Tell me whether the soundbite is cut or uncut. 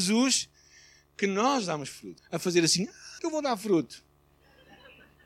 cut